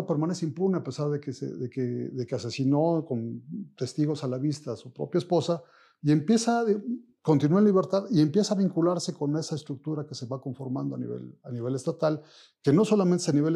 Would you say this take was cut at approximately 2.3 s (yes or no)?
no